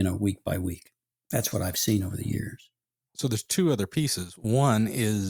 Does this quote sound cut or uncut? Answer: uncut